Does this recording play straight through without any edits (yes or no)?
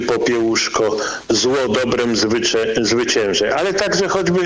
yes